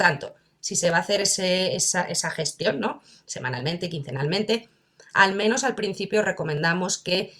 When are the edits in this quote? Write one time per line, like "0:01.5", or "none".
none